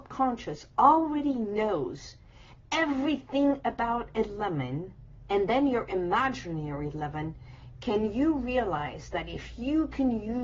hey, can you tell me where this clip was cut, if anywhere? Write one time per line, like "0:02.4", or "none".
0:05.3